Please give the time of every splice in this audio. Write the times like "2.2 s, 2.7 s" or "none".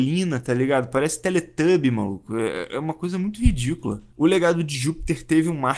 none